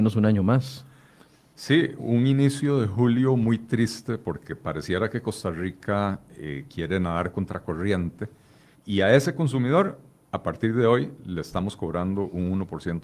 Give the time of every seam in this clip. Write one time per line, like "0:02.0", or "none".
0:02.0
0:08.7

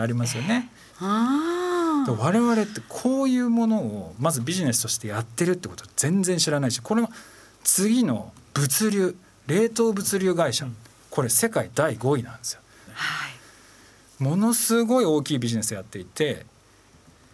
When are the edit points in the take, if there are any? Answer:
0:00.9
0:12.9

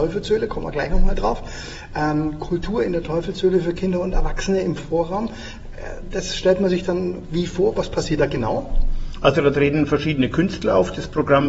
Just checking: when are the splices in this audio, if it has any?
none

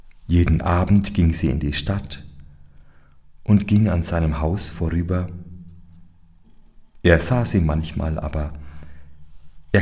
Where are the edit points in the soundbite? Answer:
none

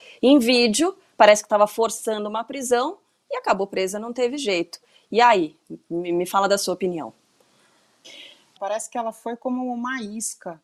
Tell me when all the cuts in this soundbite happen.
0:08.6

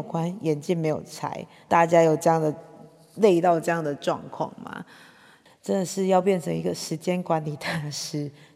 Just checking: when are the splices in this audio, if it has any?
0:05.5

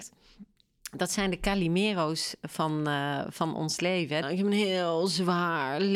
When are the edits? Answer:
0:04.2

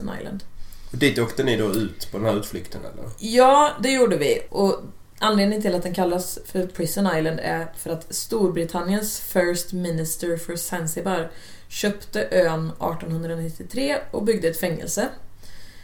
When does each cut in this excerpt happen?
0:04.5

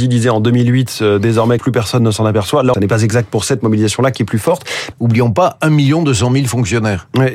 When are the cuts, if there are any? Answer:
0:01.6
0:02.7
0:04.9

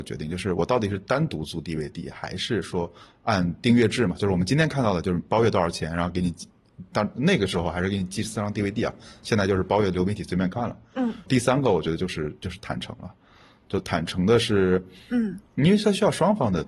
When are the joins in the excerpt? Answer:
0:11.3

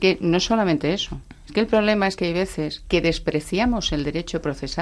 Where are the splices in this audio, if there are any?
none

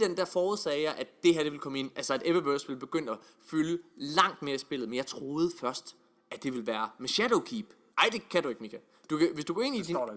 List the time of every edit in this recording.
0:07.9

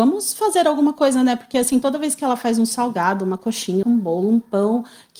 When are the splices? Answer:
0:03.8

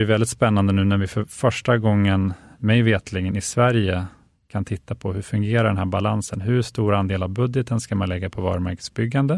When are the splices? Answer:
none

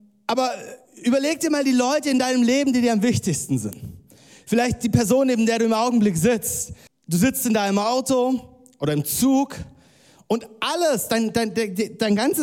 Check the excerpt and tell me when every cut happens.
0:06.9

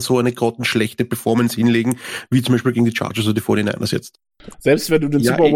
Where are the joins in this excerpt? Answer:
0:04.5

